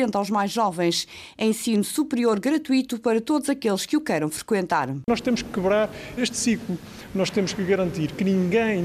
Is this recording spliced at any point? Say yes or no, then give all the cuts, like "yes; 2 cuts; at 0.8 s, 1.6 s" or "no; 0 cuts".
yes; 1 cut; at 6.2 s